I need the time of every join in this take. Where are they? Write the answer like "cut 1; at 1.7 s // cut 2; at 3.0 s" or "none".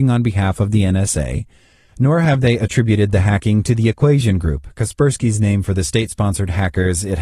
none